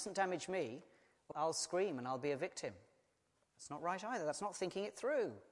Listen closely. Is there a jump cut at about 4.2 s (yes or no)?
no